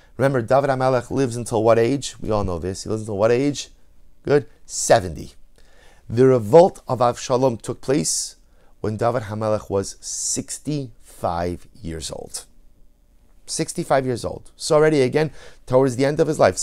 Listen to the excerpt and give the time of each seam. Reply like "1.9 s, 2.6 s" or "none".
none